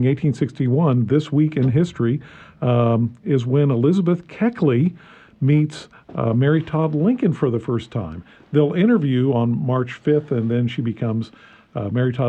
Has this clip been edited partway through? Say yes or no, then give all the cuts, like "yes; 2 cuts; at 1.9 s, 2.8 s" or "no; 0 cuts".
no; 0 cuts